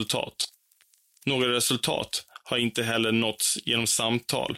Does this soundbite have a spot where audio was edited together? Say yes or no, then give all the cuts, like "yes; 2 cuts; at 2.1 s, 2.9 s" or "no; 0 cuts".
no; 0 cuts